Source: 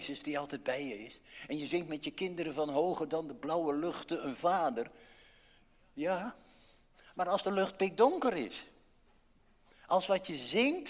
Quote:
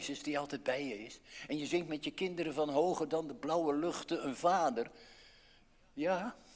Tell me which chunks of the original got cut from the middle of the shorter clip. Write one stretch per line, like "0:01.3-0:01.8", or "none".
none